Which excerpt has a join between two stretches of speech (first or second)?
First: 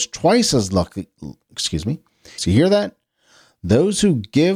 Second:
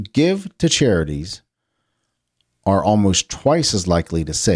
first